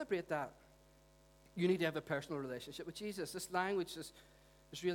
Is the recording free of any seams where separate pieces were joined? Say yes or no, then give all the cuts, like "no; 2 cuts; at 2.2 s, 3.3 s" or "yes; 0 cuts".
yes; 0 cuts